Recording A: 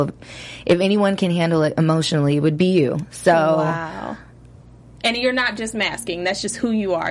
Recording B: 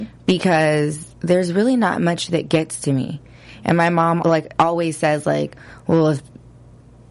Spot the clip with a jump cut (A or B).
B